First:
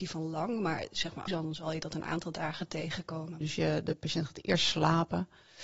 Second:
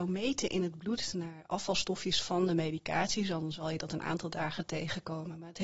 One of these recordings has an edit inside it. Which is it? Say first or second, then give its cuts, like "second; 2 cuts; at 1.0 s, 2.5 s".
first; 2 cuts; at 1.3 s, 3.4 s